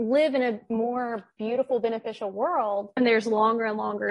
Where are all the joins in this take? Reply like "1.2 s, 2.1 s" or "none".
3.0 s